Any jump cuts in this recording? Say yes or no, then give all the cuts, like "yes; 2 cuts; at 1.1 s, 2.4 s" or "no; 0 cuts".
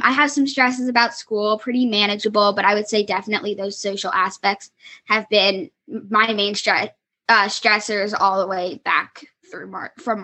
no; 0 cuts